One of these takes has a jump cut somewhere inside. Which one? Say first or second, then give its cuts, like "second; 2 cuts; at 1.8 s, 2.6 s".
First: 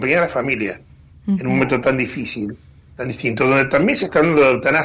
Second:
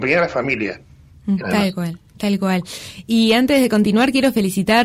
second; 1 cut; at 1.4 s